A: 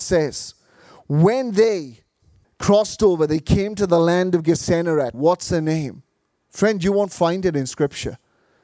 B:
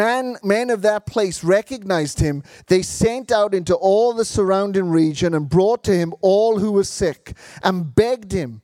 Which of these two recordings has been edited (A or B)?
A